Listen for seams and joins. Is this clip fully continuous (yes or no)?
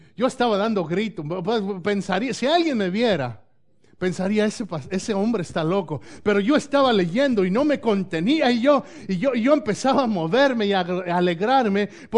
yes